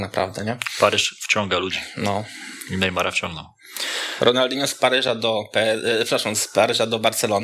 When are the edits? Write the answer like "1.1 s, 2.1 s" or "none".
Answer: none